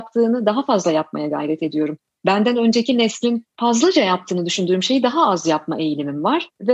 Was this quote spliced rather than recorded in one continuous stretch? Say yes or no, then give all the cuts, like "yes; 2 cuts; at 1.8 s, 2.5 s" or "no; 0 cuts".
no; 0 cuts